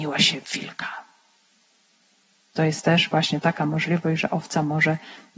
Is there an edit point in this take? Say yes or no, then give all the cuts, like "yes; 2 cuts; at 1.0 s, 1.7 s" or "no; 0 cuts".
yes; 1 cut; at 2.5 s